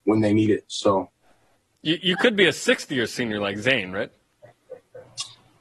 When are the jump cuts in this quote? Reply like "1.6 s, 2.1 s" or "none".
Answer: none

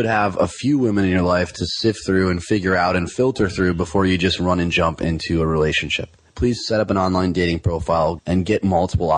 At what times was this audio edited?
6.3 s, 8.2 s

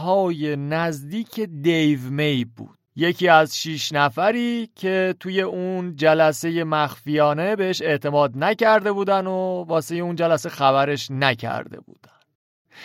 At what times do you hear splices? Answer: 2.9 s

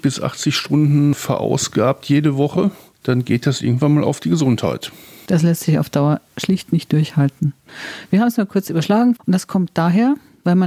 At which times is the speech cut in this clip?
9.2 s

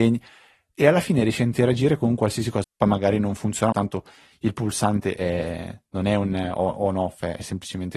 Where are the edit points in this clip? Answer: 2.6 s, 3.7 s

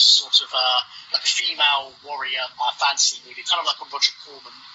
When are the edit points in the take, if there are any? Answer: 1.1 s, 2.5 s

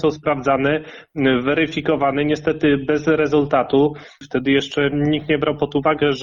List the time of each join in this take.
4.2 s

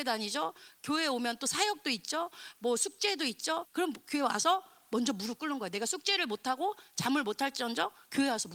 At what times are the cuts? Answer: 3.6 s

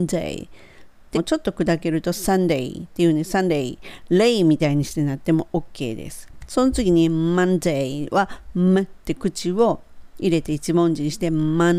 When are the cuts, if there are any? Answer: 1.1 s

